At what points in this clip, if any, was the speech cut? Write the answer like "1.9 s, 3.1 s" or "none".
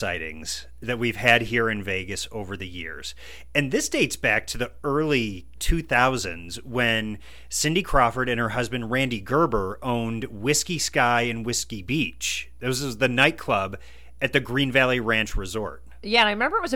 5.6 s